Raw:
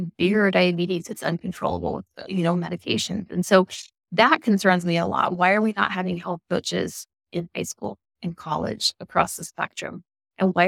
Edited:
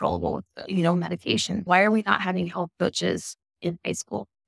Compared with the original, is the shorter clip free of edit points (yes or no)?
no